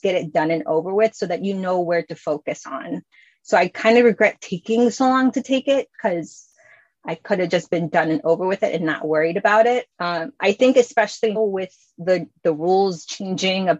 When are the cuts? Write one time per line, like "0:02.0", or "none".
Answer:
0:09.9
0:11.4